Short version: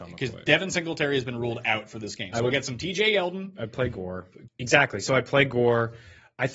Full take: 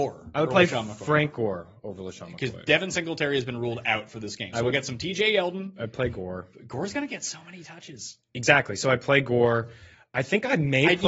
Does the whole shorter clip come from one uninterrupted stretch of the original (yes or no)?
no